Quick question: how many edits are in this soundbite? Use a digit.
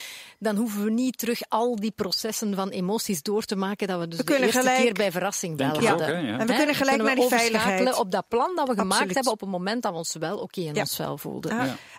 0